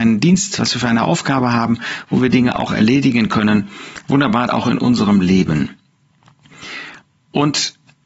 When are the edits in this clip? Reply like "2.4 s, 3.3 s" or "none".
4.5 s